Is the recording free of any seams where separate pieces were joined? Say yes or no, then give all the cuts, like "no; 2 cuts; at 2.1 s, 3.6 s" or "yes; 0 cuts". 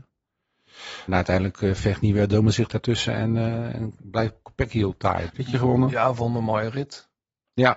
no; 2 cuts; at 1.1 s, 5.3 s